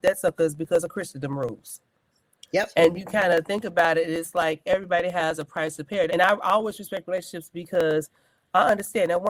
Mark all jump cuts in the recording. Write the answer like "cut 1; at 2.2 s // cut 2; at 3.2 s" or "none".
cut 1; at 2.9 s // cut 2; at 6.1 s